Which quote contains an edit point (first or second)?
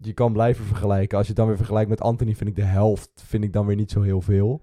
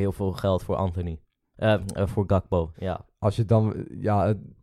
second